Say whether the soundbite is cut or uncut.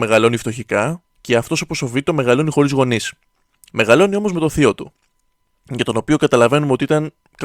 uncut